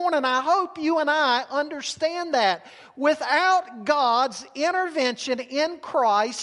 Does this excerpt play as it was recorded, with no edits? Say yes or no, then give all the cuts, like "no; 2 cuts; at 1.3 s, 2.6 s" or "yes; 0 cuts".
yes; 0 cuts